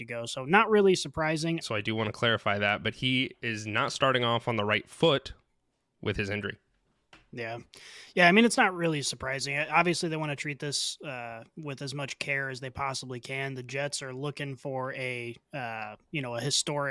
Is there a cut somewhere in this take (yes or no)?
yes